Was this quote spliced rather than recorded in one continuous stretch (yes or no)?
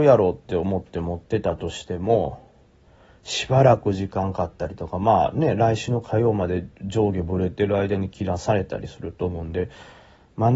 yes